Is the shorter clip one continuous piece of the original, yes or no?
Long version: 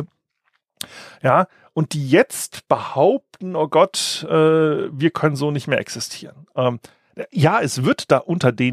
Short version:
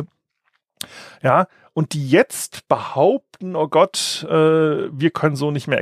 yes